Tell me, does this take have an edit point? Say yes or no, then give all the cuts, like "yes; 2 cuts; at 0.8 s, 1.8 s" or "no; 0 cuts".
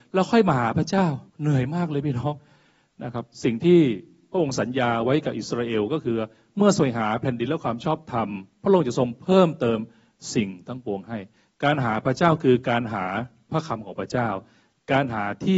yes; 1 cut; at 1.3 s